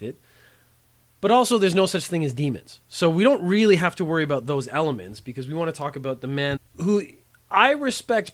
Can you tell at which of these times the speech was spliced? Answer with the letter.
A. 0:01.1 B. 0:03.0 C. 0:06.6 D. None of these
C